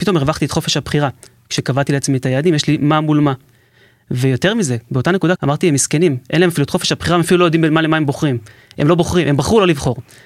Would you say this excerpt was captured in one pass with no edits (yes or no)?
no